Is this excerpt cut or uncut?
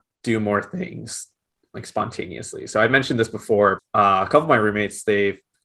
uncut